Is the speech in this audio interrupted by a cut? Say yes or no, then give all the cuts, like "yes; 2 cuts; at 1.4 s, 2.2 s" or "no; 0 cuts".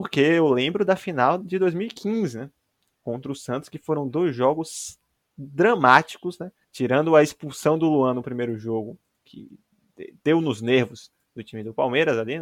yes; 1 cut; at 6.6 s